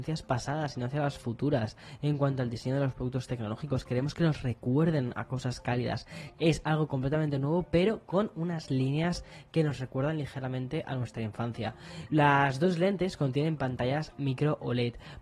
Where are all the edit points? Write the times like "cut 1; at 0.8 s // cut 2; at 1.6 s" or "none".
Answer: cut 1; at 6.3 s // cut 2; at 12.1 s